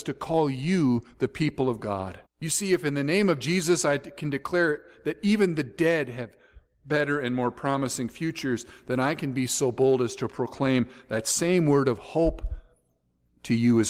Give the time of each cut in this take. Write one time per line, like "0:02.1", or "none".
0:02.3